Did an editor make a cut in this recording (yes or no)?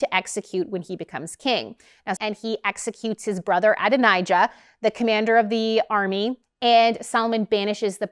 yes